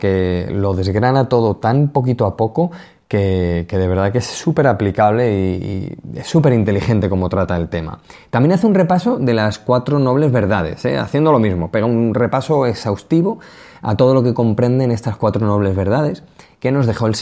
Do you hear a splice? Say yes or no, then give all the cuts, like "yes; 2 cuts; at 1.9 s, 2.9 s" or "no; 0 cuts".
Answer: no; 0 cuts